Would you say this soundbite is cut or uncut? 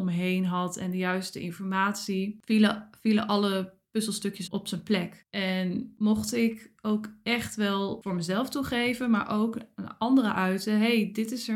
cut